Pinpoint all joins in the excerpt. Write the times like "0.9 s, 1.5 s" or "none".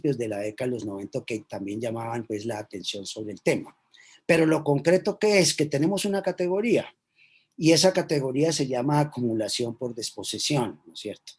none